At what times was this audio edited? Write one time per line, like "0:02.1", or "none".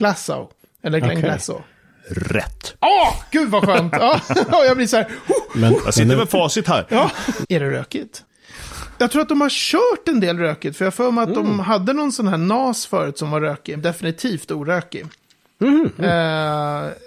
0:07.4
0:13.8